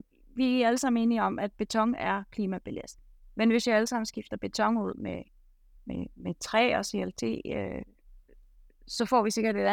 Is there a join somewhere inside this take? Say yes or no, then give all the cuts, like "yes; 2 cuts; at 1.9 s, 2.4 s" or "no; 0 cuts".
no; 0 cuts